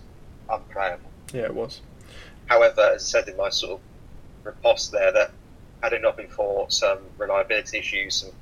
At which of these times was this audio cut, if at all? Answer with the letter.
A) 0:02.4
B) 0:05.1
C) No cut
A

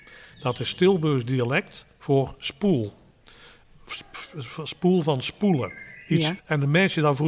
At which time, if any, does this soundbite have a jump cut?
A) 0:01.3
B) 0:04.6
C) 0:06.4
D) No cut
C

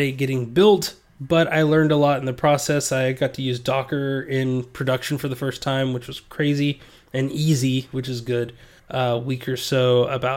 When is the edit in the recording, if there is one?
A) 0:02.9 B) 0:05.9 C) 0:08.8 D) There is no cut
C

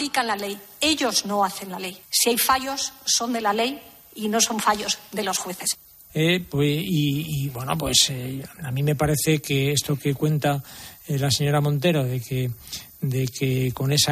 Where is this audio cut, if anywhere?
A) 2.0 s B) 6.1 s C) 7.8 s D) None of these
B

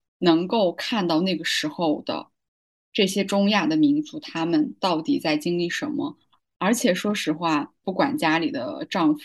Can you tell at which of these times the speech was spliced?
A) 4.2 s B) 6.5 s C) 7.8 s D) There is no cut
C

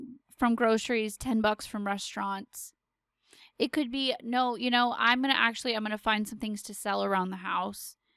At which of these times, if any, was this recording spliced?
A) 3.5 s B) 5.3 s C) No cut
C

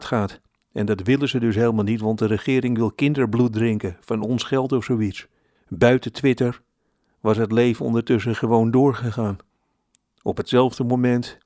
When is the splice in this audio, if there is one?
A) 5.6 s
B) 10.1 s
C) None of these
A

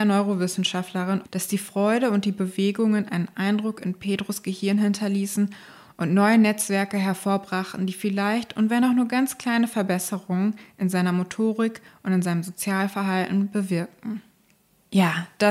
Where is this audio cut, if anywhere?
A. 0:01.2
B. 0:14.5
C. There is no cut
A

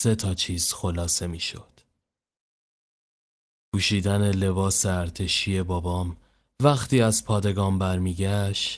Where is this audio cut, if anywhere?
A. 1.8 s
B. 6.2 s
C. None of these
C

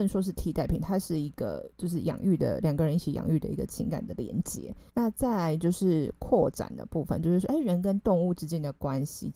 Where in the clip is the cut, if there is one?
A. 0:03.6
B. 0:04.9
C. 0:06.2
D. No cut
B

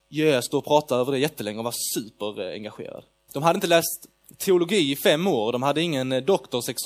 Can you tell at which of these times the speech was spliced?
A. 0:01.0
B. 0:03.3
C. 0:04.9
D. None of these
B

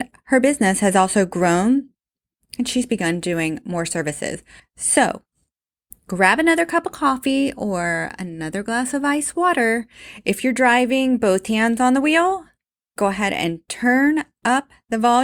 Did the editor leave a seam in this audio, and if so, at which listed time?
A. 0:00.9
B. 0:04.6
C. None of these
B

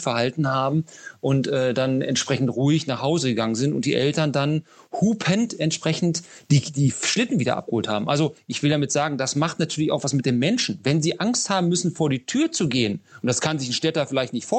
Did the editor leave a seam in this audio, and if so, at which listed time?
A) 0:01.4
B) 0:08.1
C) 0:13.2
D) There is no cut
D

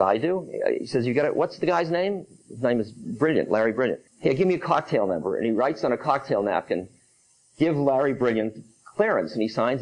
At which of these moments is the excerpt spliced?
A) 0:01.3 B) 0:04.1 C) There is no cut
B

